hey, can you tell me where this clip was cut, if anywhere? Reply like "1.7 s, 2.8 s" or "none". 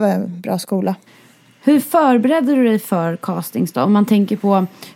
none